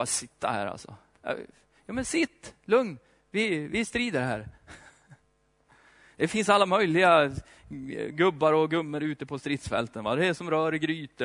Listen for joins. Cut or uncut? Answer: uncut